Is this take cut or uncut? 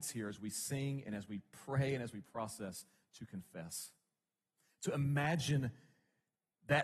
uncut